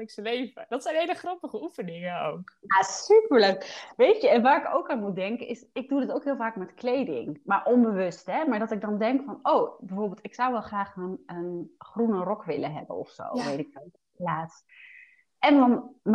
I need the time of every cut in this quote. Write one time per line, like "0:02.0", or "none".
none